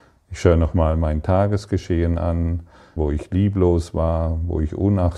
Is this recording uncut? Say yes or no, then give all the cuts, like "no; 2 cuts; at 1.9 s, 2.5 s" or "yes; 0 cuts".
no; 1 cut; at 3.0 s